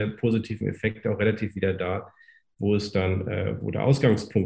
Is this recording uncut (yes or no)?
yes